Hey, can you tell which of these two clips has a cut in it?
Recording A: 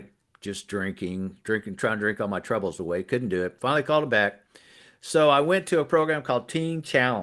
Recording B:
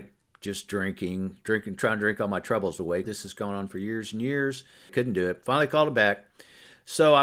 B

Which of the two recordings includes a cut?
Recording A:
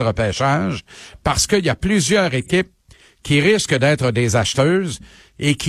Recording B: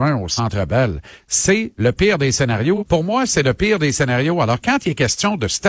B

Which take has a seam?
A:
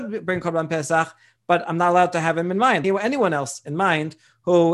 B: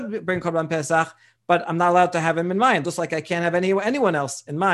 A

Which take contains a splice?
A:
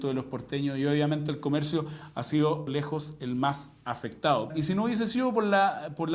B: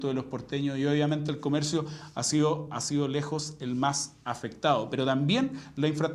A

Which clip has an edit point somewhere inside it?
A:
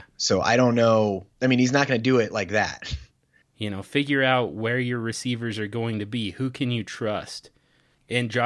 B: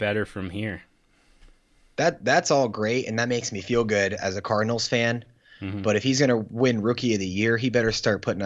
A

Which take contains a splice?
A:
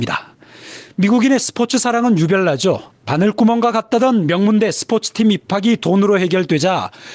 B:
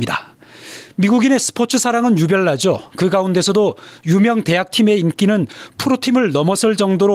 A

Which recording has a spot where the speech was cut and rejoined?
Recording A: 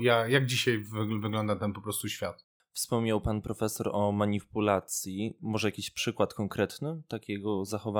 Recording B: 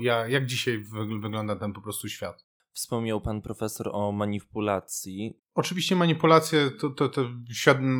B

